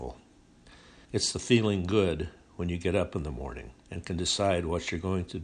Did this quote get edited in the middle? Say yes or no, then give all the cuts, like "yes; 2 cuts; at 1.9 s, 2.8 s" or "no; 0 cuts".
yes; 2 cuts; at 1.1 s, 3.8 s